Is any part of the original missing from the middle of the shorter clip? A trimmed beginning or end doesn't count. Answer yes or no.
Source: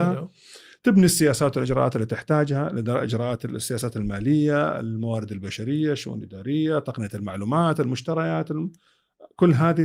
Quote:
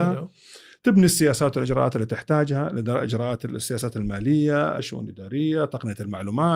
yes